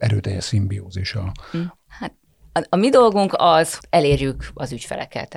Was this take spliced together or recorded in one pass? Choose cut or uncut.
cut